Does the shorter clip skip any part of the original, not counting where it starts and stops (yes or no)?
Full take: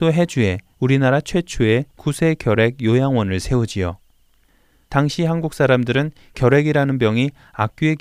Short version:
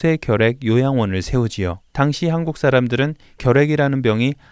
yes